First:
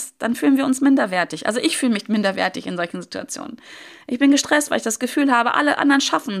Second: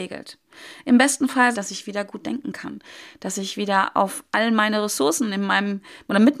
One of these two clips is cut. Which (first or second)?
second